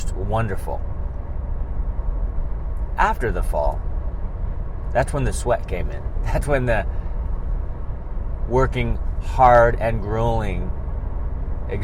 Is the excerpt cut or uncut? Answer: uncut